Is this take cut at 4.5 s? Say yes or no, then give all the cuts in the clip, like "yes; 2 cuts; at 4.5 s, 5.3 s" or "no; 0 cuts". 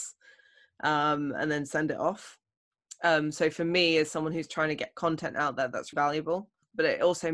yes; 2 cuts; at 4.5 s, 5.9 s